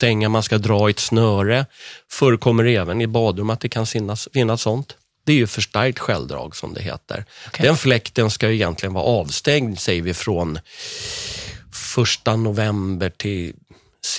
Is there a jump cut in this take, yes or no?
no